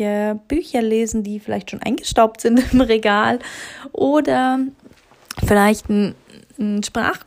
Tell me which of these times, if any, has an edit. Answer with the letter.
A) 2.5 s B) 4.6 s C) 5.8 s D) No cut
D